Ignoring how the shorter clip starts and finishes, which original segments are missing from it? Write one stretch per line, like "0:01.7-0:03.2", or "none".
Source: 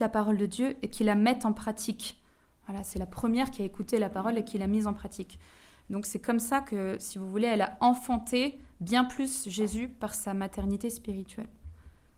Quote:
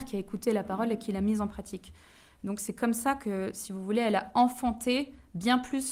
none